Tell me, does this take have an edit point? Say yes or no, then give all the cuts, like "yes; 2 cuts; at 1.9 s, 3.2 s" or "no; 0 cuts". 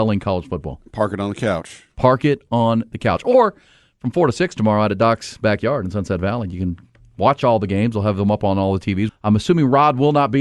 yes; 1 cut; at 9.1 s